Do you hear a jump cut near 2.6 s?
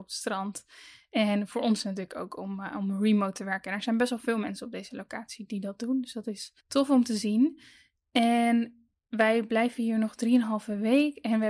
no; 1 cut; at 6.6 s

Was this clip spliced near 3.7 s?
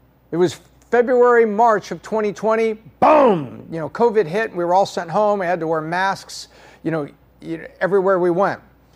no; 0 cuts

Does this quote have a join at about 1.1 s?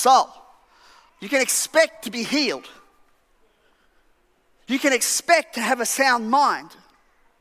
yes; 1 cut; at 1.1 s

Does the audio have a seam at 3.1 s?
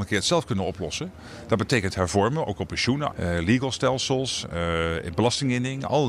yes; 1 cut; at 3.1 s

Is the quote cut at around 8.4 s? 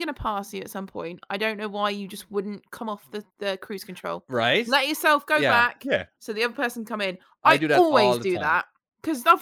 no; 1 cut; at 3.3 s

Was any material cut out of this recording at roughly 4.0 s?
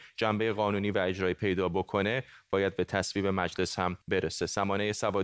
yes; 1 cut; at 4.0 s

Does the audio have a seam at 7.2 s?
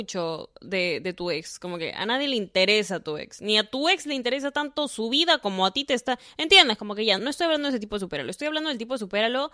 yes; 1 cut; at 7.2 s

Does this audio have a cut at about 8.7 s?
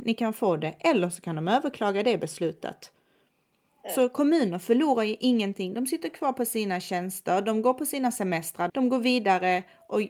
yes; 1 cut; at 8.7 s

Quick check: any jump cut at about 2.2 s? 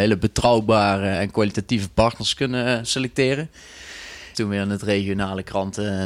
no; 1 cut; at 4.3 s

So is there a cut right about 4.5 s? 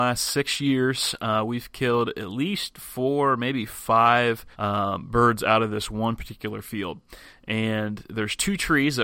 yes; 1 cut; at 4.5 s

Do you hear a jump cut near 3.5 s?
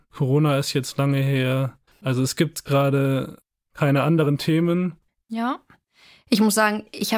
no; 2 cuts; at 1.9 s, 5.2 s

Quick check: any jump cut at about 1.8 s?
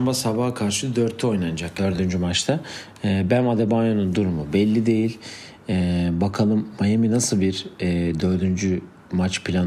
yes; 1 cut; at 1.8 s

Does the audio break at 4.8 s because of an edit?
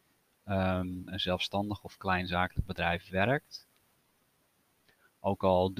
no; 1 cut; at 1.1 s

